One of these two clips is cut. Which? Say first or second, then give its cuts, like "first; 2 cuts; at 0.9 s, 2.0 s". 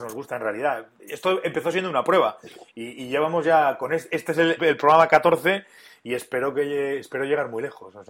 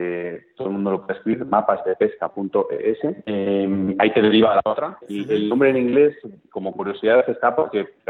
first; 1 cut; at 4.6 s